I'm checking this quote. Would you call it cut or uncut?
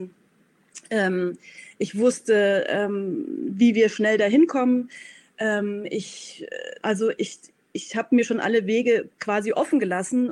cut